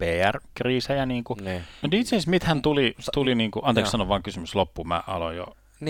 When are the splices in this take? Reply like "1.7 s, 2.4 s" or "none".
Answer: 1.8 s